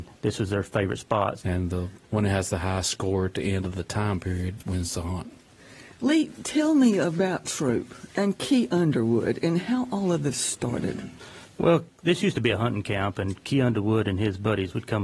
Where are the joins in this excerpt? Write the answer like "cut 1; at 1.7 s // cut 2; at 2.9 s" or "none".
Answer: cut 1; at 1.4 s